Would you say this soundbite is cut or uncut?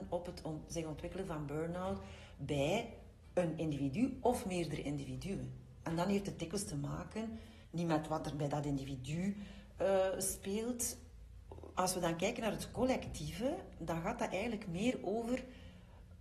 cut